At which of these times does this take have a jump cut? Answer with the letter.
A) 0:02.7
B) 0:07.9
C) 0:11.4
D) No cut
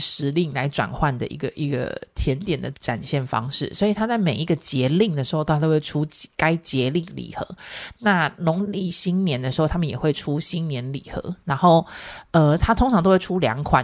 A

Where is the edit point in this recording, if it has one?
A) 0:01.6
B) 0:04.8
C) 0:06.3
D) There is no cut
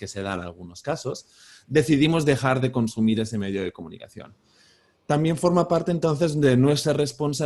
D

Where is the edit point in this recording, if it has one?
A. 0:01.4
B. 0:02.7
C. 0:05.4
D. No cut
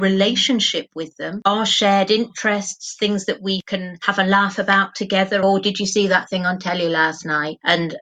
C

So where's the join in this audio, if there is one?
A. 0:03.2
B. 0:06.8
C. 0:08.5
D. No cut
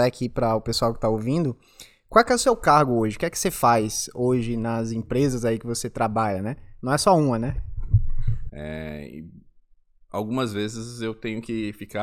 C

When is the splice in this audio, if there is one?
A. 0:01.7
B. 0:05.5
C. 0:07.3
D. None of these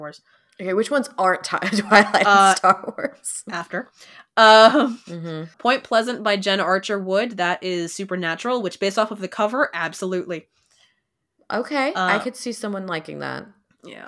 B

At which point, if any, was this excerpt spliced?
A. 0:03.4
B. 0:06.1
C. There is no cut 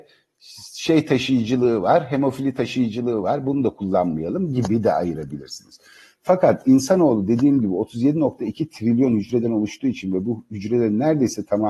C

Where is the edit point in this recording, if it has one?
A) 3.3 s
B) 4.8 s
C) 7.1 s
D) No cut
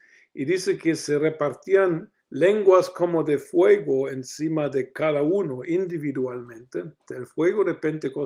C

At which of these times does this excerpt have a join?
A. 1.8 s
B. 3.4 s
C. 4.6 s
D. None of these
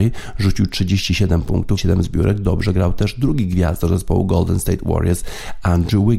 A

